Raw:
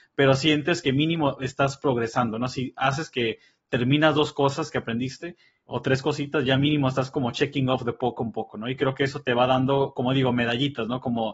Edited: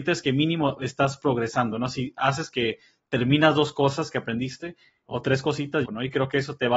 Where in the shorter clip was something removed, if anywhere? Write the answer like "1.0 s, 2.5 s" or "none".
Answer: 5.8 s